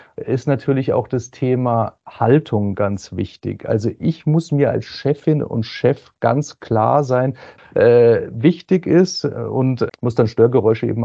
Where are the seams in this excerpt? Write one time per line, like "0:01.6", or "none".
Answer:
0:07.6
0:09.9